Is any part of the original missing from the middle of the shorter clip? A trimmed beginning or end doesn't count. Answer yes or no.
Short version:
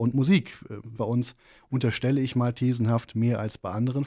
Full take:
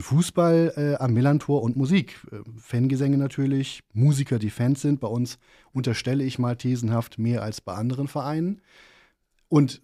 yes